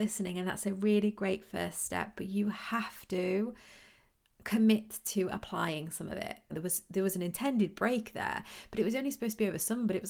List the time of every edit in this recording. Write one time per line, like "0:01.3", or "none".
0:06.5